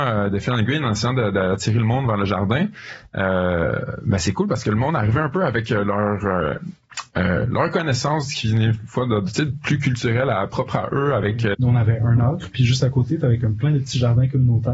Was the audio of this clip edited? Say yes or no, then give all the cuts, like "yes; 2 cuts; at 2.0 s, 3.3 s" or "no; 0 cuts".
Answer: yes; 1 cut; at 11.5 s